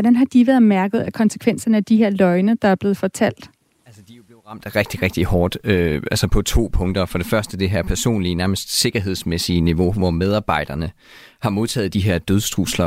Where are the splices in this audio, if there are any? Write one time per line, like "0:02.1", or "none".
none